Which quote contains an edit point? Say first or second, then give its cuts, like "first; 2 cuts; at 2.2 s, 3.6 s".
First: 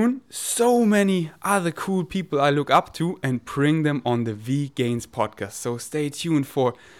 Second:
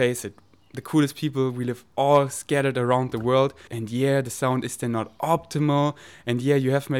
second; 1 cut; at 3.7 s